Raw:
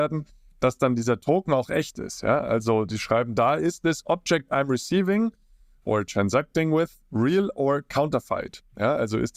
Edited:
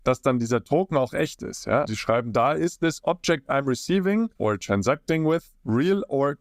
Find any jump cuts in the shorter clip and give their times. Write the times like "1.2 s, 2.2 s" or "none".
1.8 s, 4.3 s